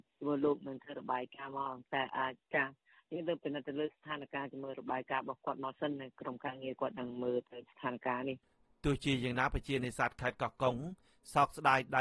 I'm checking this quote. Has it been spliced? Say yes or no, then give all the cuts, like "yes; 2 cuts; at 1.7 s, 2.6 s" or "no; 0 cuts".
no; 0 cuts